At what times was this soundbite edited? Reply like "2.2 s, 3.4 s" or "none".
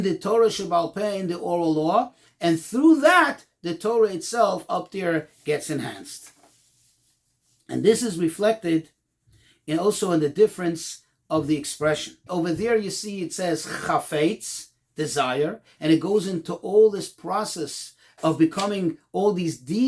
12.3 s, 15.8 s